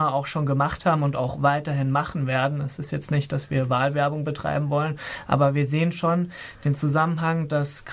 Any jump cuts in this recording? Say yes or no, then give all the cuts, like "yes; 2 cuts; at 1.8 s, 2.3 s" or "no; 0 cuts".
no; 0 cuts